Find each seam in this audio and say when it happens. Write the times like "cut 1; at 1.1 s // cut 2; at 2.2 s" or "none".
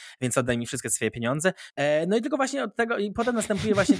cut 1; at 1.7 s